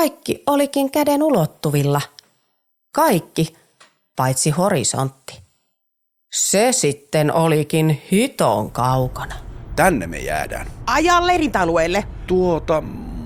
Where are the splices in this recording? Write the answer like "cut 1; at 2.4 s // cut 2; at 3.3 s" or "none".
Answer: none